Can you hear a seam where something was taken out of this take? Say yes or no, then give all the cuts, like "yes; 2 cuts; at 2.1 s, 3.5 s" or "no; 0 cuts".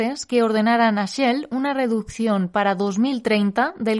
no; 0 cuts